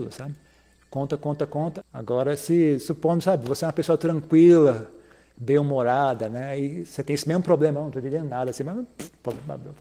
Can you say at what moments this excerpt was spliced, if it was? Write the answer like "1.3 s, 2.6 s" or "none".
1.8 s